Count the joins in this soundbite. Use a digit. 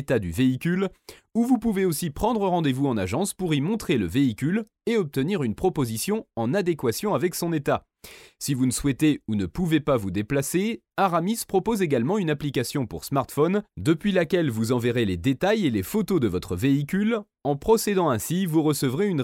0